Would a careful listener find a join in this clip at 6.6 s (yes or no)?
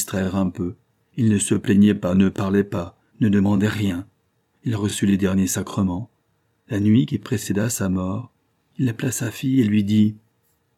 no